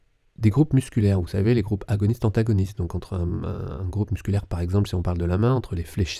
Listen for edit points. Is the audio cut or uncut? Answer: uncut